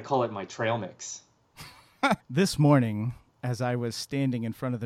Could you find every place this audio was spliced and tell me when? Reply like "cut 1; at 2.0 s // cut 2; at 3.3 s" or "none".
cut 1; at 2.2 s